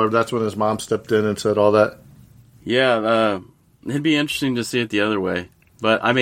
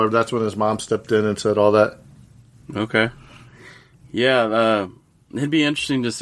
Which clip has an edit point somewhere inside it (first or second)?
first